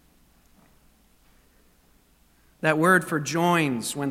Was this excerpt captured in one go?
no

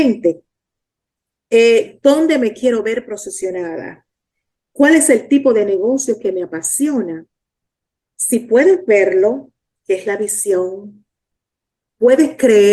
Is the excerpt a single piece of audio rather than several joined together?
yes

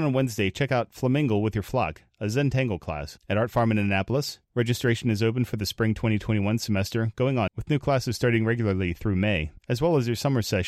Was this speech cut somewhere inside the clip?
yes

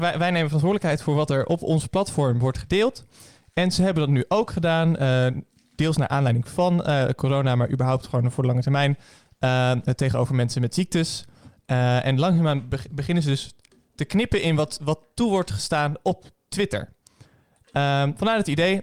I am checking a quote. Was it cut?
no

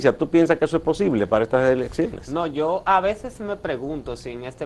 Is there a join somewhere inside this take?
no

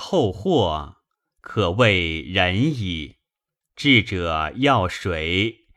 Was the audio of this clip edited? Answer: yes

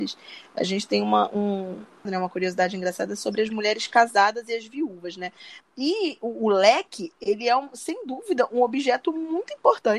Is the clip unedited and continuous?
no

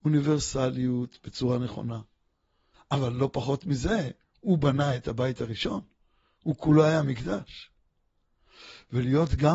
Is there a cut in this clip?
yes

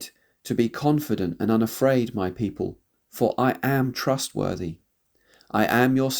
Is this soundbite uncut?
yes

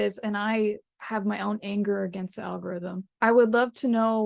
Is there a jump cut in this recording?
yes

